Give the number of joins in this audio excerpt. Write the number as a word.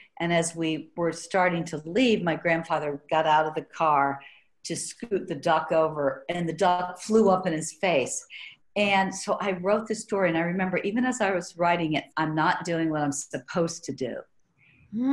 two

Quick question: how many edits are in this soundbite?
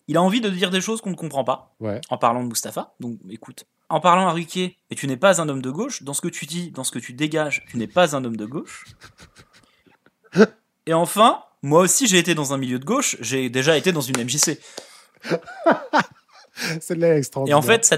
one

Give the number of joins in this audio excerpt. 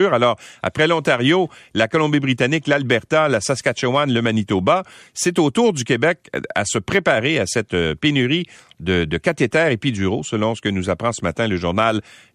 zero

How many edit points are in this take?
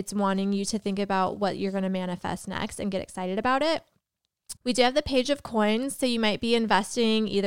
one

